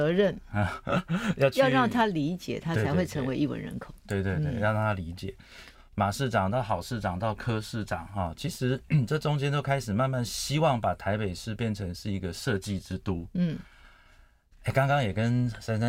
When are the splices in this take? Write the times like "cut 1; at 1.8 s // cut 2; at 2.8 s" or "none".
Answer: cut 1; at 5.7 s